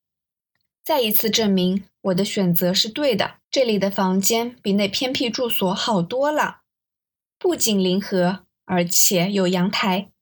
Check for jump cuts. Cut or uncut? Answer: cut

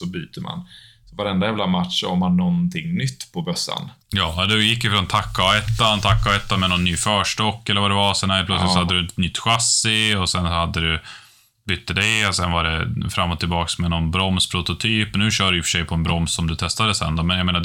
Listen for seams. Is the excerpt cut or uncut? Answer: cut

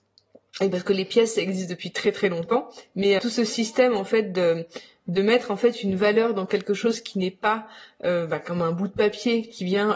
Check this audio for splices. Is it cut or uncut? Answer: cut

